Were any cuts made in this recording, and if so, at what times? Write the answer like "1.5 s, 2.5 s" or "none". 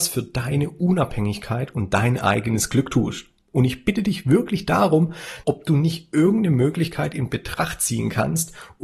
5.4 s